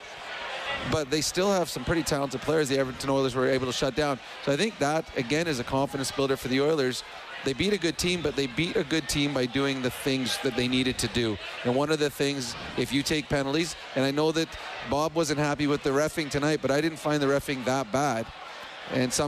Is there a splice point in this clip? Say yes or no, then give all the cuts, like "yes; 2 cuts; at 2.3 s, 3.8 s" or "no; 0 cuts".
no; 0 cuts